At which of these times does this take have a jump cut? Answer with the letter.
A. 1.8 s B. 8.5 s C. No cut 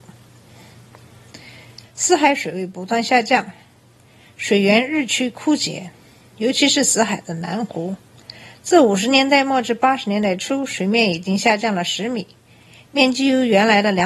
A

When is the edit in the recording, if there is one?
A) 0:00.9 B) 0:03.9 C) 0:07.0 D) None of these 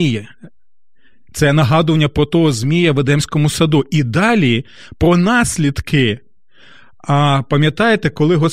D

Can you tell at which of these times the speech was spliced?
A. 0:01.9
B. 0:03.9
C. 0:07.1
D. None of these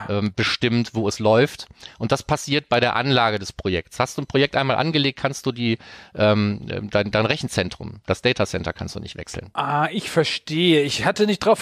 D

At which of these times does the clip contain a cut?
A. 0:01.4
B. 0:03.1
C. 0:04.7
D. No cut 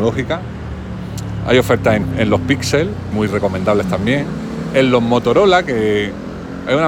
B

